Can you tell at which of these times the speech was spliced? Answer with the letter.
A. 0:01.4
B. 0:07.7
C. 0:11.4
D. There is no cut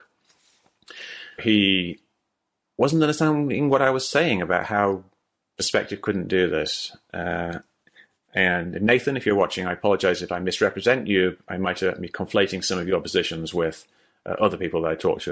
A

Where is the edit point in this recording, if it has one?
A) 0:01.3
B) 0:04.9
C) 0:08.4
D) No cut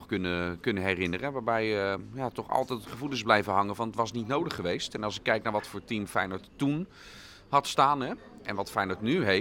C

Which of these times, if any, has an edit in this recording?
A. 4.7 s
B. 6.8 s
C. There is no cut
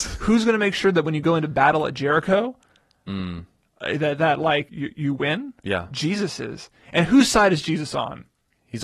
A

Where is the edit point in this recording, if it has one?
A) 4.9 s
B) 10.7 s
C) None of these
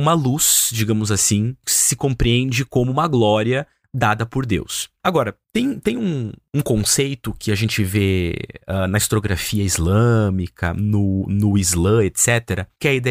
A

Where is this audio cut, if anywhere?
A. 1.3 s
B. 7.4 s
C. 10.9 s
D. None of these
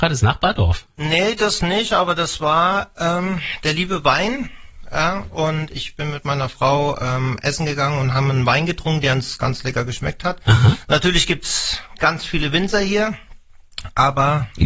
D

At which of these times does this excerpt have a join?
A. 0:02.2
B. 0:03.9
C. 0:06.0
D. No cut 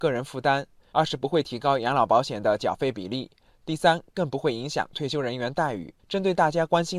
C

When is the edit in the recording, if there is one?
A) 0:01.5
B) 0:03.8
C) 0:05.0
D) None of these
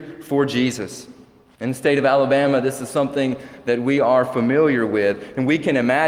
A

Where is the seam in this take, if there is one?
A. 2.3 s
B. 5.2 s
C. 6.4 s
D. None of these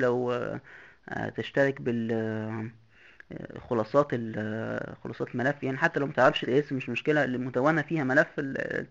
C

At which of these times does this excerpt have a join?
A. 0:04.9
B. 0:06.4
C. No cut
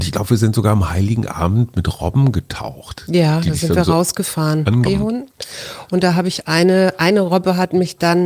A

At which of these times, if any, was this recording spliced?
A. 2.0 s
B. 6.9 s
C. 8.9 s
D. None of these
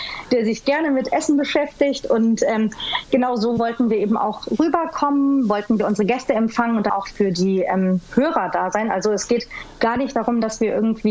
B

